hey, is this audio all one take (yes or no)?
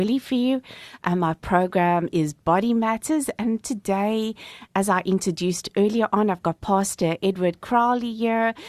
yes